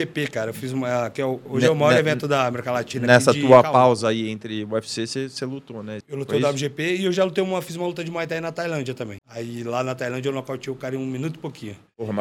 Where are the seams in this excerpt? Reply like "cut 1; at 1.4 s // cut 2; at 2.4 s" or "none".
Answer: cut 1; at 6.0 s // cut 2; at 9.2 s